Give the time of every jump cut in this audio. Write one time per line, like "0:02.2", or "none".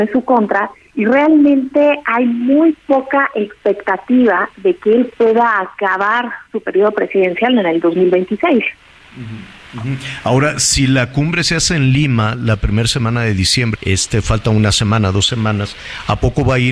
0:13.7